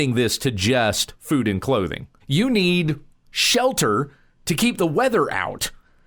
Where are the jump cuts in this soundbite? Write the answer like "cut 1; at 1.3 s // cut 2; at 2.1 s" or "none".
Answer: cut 1; at 2.2 s